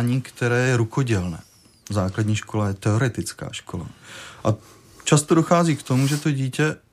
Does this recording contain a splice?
no; 0 cuts

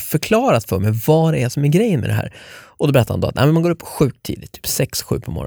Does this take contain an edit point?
no; 0 cuts

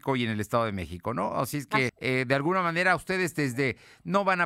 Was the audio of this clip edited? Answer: yes; 1 cut; at 1.9 s

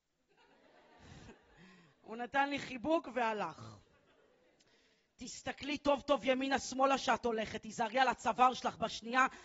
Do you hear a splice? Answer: no; 0 cuts

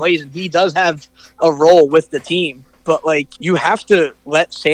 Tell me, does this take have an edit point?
yes; 1 cut; at 3.3 s

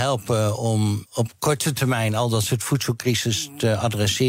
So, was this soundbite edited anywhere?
yes; 1 cut; at 1.0 s

